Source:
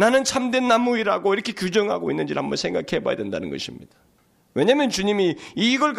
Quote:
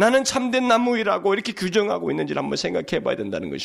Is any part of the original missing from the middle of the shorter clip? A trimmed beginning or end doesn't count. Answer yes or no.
no